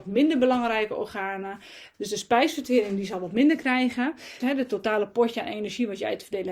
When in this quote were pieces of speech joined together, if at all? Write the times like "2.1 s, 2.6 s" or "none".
1.9 s, 4.4 s